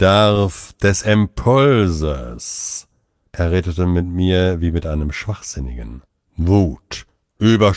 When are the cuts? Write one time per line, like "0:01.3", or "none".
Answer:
0:06.3